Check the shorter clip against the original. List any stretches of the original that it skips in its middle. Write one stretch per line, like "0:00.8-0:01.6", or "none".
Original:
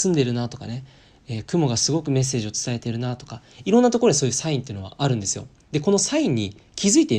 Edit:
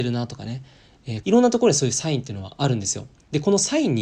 0:01.4-0:03.6